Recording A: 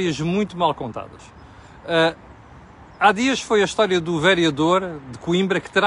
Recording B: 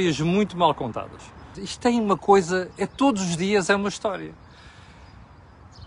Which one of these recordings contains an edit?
B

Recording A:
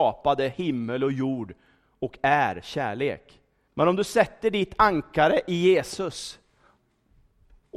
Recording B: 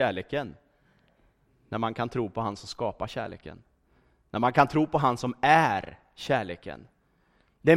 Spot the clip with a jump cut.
A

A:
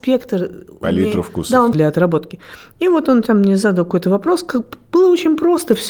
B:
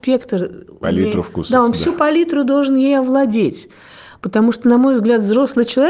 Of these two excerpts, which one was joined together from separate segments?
A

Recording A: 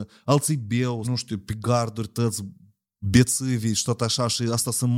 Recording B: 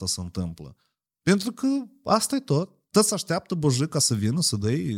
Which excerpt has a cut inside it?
A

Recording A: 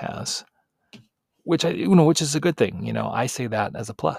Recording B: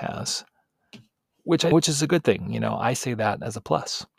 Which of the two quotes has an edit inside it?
B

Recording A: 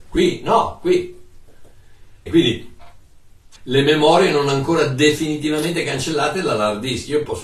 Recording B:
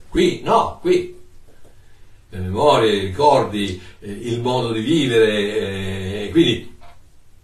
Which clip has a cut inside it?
A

